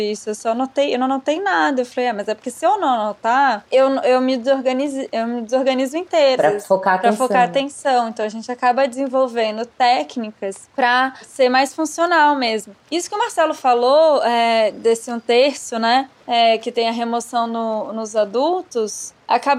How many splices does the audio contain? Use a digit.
1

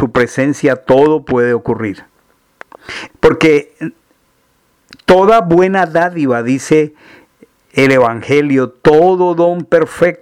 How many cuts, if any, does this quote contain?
1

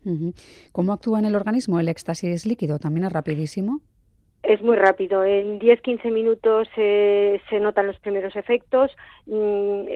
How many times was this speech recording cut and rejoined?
0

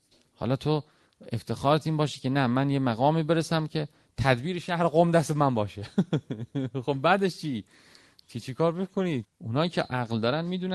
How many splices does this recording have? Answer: 1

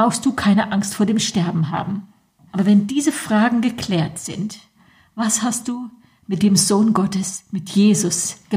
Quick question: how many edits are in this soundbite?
1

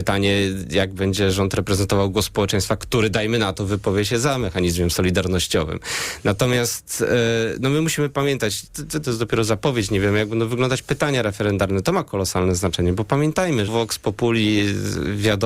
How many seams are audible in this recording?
2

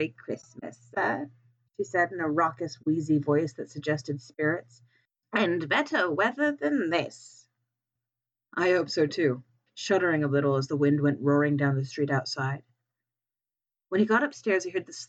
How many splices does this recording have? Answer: 1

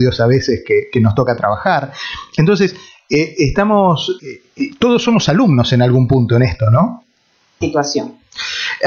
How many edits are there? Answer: 2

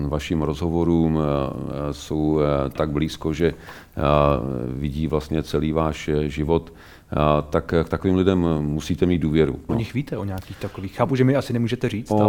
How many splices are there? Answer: 1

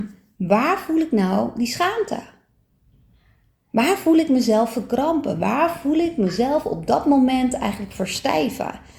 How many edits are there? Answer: 0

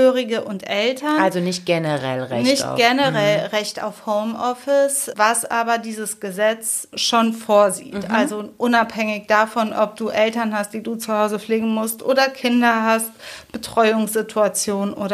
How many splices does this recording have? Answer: 0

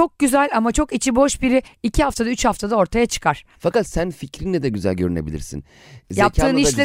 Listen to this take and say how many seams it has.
1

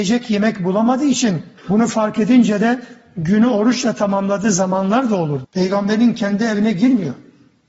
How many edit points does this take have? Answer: 2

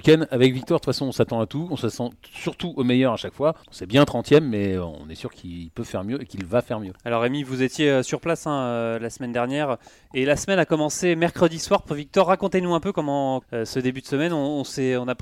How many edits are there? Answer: 2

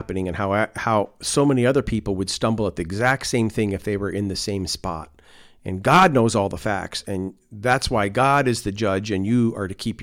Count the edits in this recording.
0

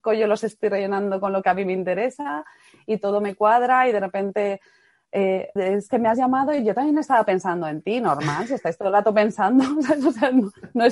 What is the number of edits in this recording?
1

